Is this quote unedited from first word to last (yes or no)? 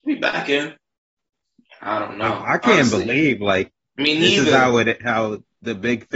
no